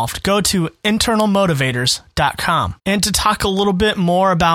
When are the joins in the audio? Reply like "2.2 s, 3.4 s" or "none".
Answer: 2.8 s